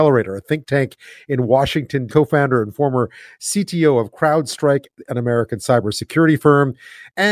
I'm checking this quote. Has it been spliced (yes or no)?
yes